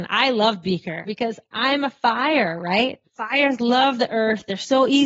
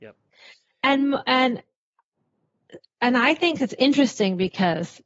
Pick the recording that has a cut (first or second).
first